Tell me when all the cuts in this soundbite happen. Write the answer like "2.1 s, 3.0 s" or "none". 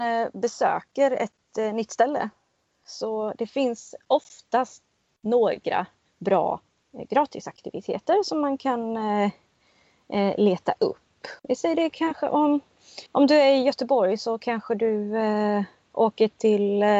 11.4 s, 13.1 s